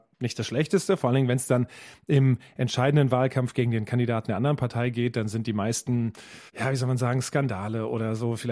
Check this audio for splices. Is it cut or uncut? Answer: cut